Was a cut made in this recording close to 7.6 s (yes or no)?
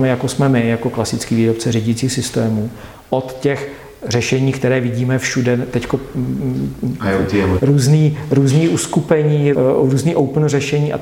yes